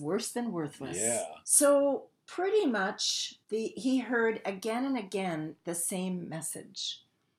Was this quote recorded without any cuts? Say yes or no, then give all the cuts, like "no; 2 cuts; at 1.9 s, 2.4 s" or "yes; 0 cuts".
no; 2 cuts; at 1.4 s, 3.4 s